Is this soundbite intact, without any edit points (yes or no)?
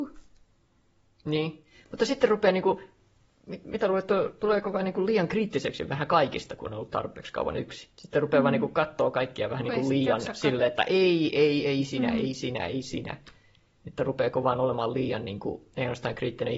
no